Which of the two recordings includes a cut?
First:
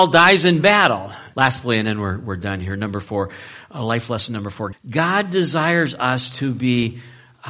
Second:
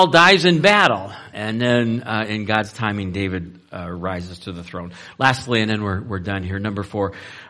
first; 2 cuts; at 1.3 s, 4.7 s

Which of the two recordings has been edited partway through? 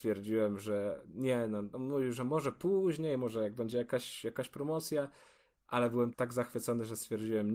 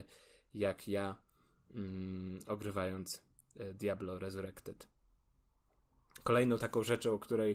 first; 1 cut; at 6.1 s

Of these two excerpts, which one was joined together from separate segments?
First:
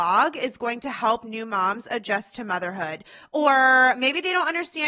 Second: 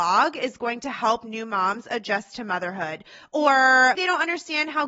second; 1 cut; at 3.9 s

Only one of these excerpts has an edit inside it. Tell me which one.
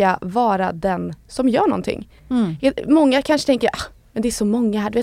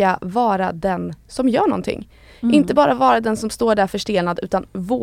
first; 1 cut; at 2.2 s

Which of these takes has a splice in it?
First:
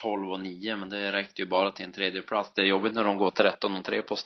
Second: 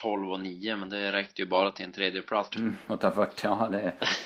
second; 1 cut; at 2.5 s

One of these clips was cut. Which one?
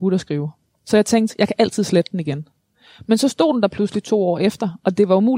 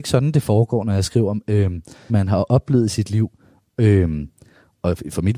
second; 1 cut; at 2.1 s

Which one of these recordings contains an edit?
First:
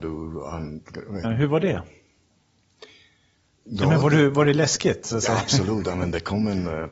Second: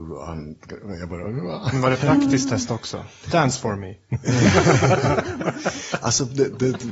first; 1 cut; at 1.2 s

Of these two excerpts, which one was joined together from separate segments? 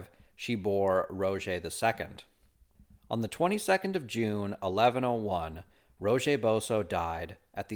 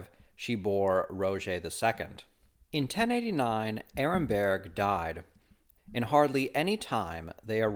second; 2 cuts; at 2.6 s, 5.8 s

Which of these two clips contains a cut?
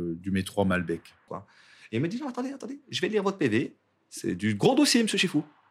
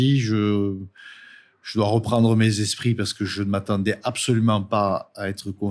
first; 1 cut; at 1.3 s

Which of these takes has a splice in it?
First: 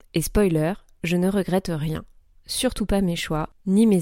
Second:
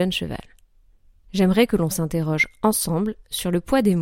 second; 1 cut; at 1.2 s

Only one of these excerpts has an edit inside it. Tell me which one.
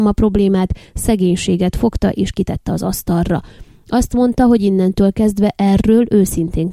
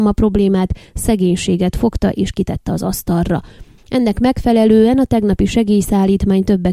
second; 1 cut; at 3.8 s

